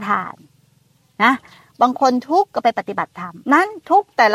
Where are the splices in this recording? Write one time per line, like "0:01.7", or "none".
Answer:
0:03.4